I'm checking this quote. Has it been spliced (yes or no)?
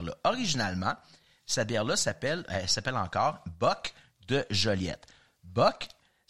no